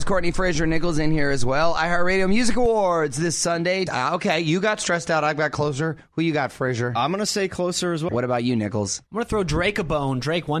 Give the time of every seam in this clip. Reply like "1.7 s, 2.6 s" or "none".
3.9 s, 8.1 s